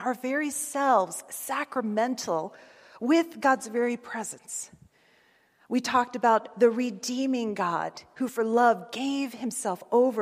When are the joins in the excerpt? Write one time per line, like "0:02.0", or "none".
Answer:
none